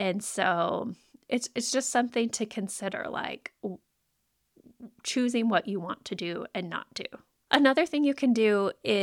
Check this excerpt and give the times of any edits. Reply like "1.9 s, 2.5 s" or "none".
7.4 s